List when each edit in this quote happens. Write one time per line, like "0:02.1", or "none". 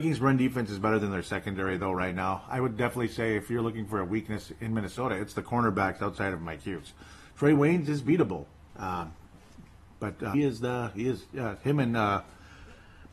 0:08.7
0:10.3